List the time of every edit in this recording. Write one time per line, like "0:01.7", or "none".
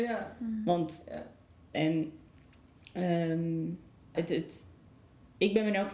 0:01.7
0:04.1